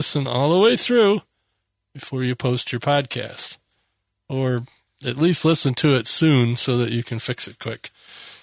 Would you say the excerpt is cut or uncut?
uncut